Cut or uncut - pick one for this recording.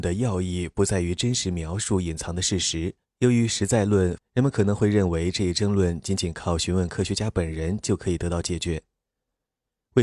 cut